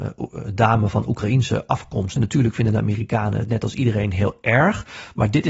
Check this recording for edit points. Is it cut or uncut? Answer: cut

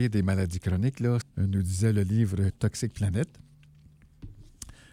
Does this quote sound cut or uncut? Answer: cut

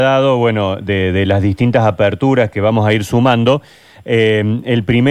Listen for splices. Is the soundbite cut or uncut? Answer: uncut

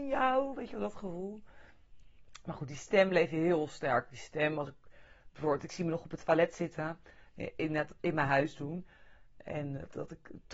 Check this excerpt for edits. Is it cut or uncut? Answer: uncut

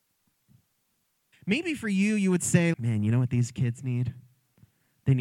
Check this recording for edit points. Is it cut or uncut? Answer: cut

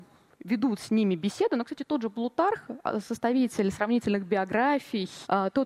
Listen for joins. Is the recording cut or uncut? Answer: uncut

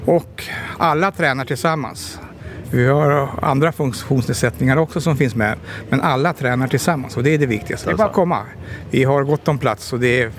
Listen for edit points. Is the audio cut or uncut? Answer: cut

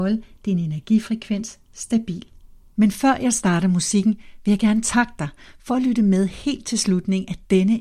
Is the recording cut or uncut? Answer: cut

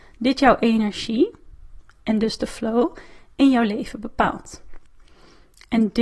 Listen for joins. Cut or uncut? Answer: uncut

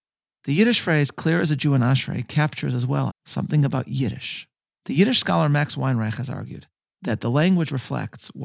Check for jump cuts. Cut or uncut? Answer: cut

